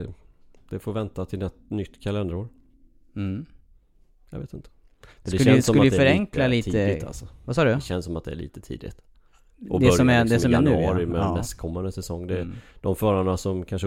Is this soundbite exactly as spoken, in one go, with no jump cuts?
yes; 0 cuts

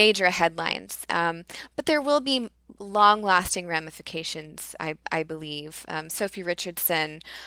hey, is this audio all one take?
yes; 0 cuts

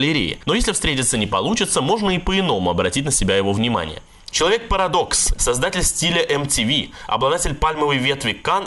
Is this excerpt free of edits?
no; 2 cuts; at 4.3 s, 5.3 s

